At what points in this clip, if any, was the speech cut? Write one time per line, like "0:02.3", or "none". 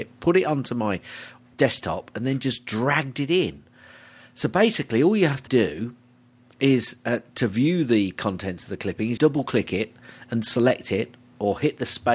0:01.5
0:05.5
0:09.2